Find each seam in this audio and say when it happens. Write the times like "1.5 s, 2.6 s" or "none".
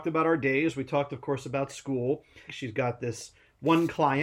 2.5 s